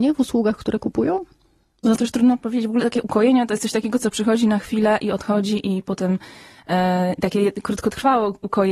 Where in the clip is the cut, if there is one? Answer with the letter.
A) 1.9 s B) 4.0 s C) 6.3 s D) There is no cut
A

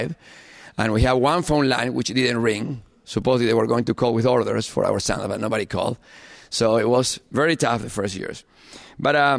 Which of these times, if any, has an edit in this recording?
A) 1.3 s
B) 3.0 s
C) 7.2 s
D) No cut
D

